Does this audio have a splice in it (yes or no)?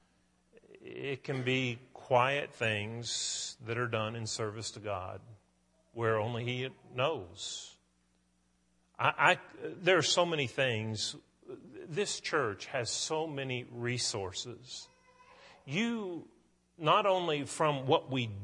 no